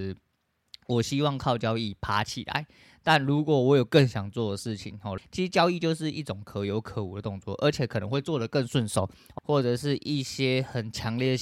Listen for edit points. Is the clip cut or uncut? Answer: cut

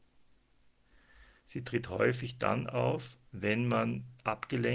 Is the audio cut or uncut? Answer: cut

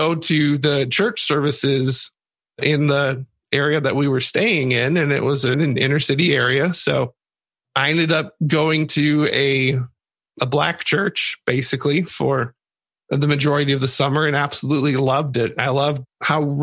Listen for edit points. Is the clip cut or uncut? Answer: cut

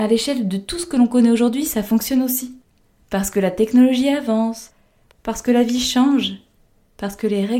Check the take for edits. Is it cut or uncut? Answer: cut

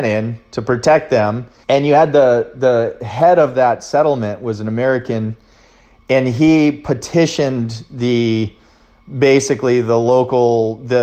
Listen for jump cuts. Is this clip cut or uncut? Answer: cut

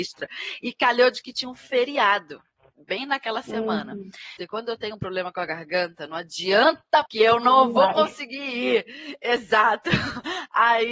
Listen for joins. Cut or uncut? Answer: cut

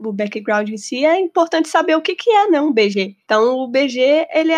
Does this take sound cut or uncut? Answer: uncut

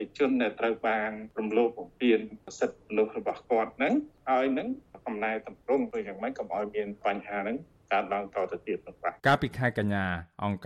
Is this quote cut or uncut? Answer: cut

